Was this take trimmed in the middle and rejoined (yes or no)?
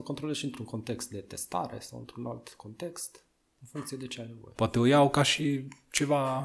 yes